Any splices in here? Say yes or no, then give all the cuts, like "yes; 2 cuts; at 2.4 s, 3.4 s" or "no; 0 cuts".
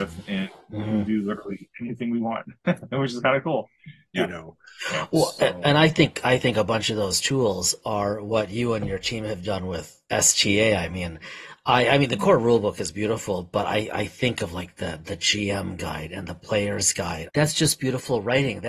yes; 2 cuts; at 4.1 s, 17.3 s